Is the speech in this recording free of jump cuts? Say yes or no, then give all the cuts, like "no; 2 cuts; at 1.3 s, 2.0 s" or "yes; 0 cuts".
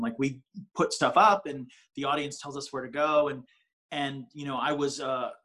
yes; 0 cuts